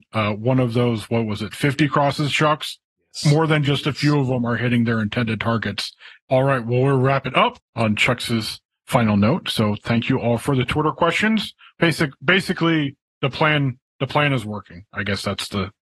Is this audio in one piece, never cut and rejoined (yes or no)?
no